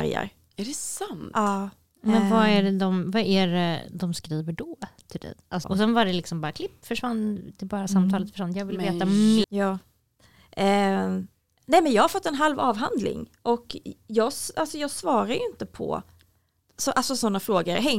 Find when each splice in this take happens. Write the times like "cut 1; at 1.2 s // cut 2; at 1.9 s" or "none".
cut 1; at 5.6 s // cut 2; at 9.4 s